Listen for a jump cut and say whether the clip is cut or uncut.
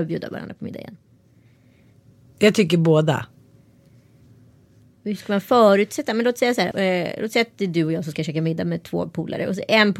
cut